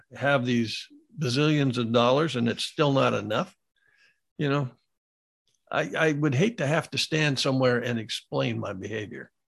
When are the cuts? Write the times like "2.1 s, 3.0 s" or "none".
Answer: none